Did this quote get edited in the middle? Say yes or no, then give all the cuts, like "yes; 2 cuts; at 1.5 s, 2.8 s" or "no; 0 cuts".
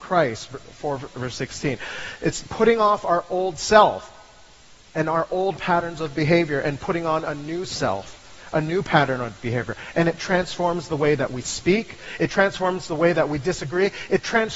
yes; 1 cut; at 12.2 s